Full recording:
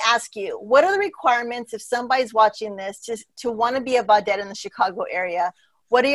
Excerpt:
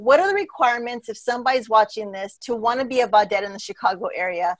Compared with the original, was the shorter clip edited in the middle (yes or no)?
yes